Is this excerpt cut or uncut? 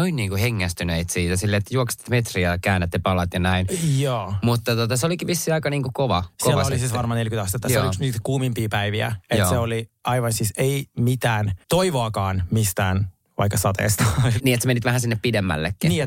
cut